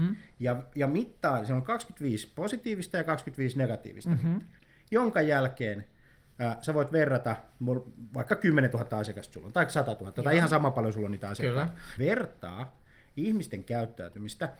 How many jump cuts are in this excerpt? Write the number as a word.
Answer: one